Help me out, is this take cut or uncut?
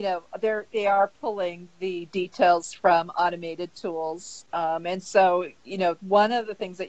uncut